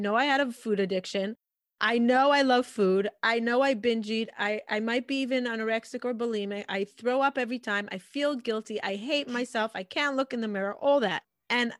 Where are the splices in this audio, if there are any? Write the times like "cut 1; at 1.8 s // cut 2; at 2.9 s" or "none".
none